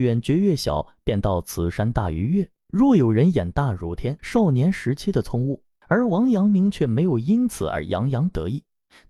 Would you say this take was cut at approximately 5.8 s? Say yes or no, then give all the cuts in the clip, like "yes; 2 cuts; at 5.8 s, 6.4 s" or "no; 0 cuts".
yes; 2 cuts; at 4.2 s, 5.8 s